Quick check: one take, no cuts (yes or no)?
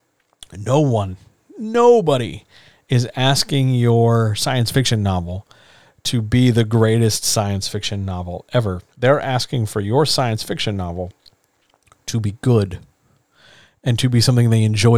no